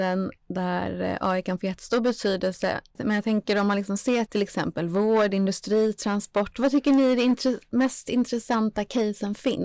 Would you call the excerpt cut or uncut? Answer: cut